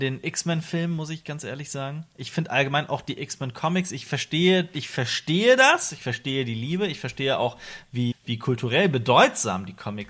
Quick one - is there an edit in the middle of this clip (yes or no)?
yes